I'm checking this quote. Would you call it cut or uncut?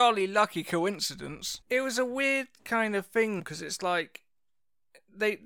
cut